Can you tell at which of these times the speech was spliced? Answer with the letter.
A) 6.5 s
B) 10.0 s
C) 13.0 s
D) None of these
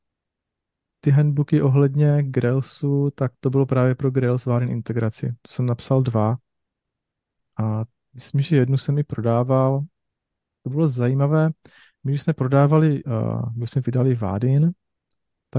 C